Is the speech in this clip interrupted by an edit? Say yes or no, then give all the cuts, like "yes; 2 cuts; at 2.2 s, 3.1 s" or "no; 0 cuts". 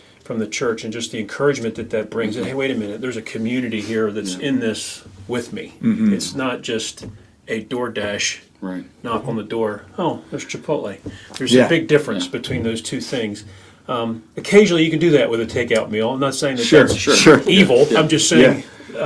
no; 0 cuts